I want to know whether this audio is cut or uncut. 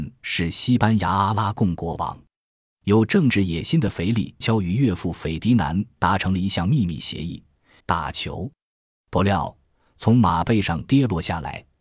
cut